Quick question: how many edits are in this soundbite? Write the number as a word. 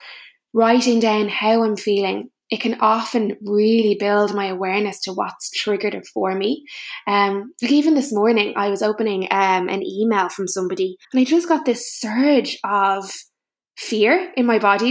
one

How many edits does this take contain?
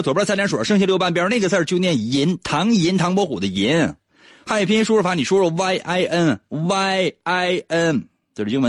zero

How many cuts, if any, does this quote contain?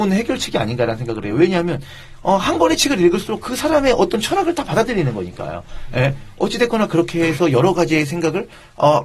zero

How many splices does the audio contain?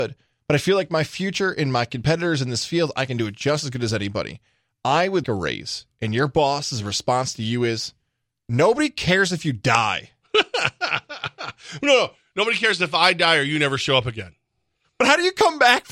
one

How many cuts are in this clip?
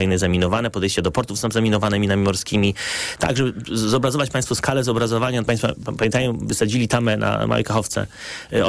two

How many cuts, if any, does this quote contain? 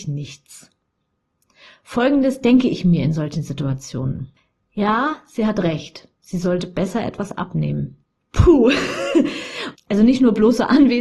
two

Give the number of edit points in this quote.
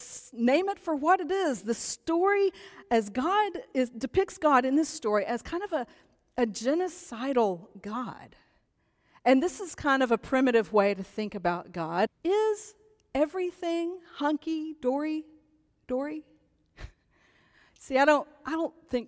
one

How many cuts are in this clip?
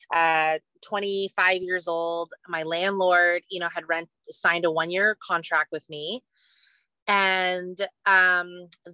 zero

